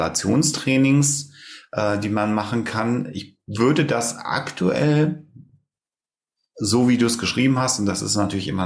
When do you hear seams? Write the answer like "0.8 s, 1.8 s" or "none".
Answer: none